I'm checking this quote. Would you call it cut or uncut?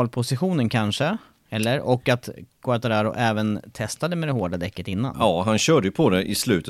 uncut